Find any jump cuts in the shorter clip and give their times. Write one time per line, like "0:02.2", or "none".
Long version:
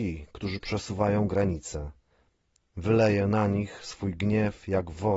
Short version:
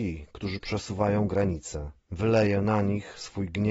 0:02.0

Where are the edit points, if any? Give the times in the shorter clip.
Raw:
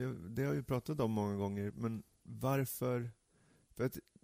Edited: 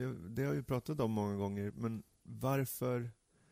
none

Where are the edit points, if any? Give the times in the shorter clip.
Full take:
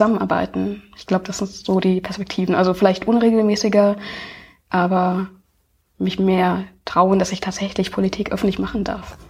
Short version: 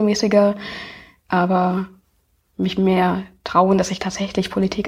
none

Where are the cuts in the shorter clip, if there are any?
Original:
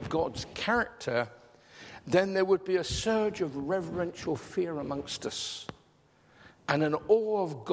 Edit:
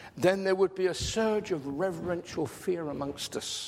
none

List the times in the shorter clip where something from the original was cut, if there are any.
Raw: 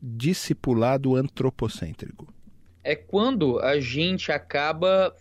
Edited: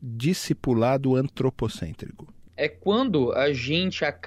0:02.5

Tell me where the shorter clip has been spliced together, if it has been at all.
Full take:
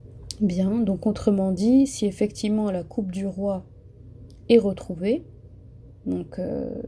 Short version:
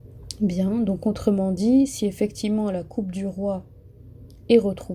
none

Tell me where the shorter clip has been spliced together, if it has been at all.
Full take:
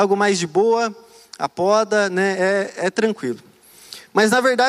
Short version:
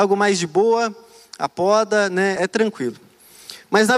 0:02.4

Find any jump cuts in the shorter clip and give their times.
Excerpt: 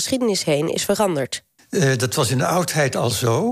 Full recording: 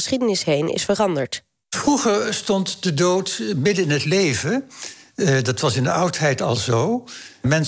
0:01.6

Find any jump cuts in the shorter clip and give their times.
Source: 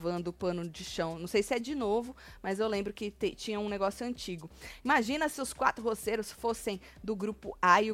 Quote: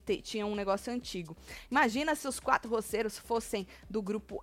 none

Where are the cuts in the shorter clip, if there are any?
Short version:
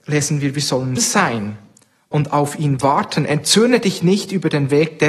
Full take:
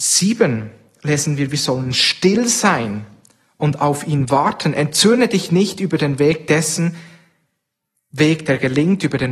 0:01.0

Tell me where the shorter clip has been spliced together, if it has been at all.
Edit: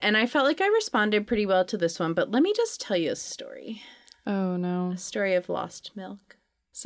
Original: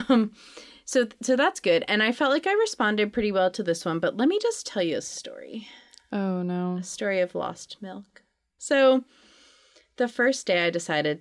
none

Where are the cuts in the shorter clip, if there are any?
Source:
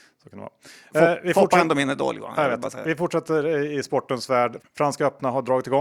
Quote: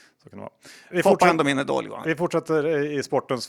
0:00.9
0:02.0

